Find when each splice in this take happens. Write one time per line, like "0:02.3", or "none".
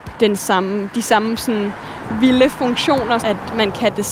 0:03.2

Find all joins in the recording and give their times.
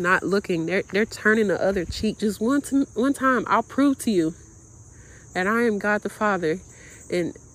0:02.2

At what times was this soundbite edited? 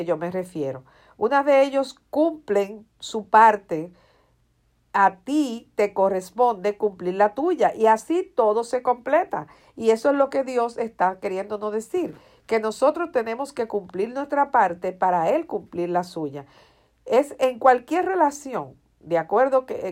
none

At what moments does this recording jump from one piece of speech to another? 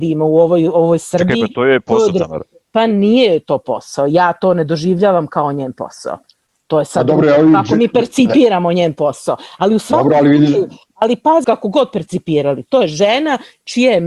0:11.4

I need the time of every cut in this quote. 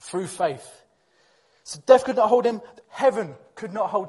0:02.8

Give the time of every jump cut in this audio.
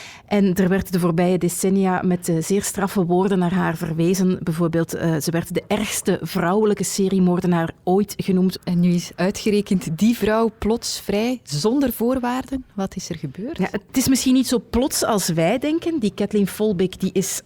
0:08.6

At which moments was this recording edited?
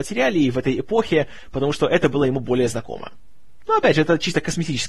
none

